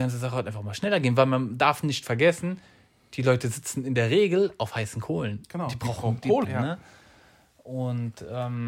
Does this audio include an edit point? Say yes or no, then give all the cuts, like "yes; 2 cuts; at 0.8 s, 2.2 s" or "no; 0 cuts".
yes; 1 cut; at 6.4 s